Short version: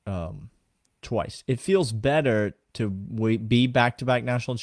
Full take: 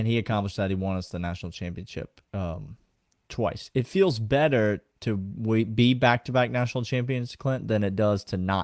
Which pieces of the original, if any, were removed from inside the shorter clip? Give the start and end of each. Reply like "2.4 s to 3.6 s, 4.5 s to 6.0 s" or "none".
none